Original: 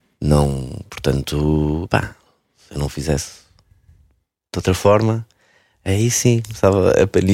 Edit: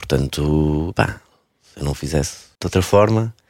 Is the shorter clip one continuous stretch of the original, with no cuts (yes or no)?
no